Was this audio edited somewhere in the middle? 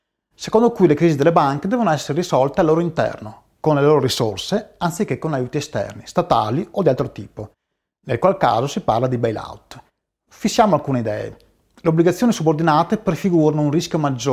no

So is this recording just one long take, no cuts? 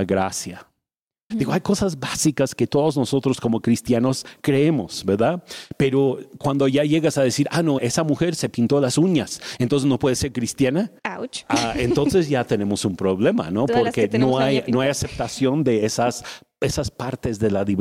no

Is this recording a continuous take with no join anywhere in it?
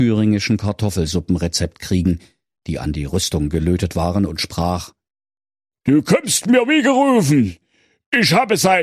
yes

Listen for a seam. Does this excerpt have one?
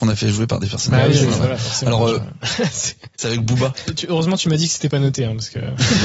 yes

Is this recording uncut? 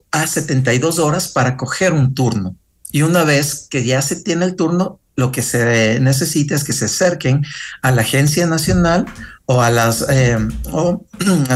yes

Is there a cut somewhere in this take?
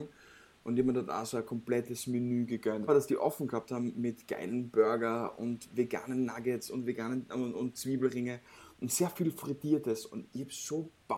yes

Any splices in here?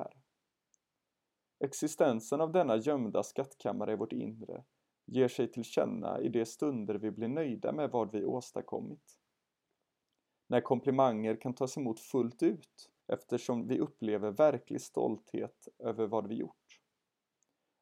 yes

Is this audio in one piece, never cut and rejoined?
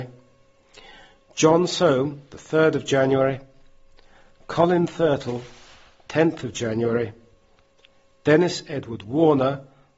yes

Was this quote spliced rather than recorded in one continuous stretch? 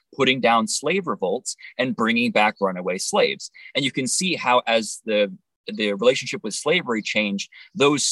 no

